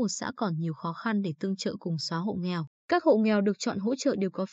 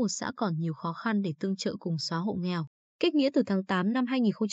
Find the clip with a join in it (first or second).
first